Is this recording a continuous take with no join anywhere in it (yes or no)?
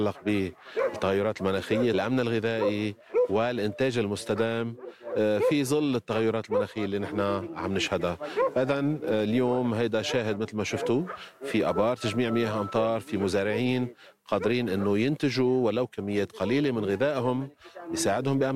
no